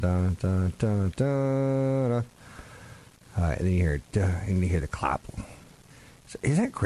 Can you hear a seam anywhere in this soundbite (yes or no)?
no